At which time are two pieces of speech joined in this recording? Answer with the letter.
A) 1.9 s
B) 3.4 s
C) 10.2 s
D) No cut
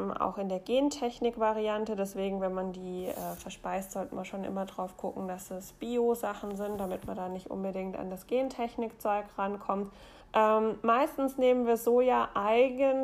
C